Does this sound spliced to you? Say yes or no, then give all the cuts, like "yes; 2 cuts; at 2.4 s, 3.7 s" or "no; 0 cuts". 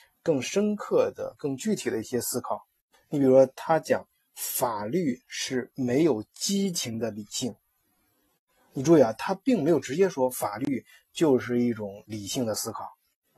no; 0 cuts